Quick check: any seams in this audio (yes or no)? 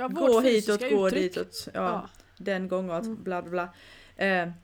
no